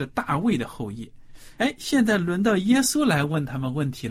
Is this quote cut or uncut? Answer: cut